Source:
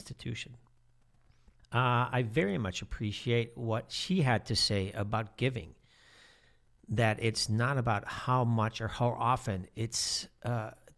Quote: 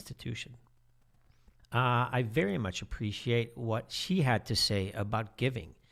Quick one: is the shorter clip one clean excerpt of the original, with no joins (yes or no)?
yes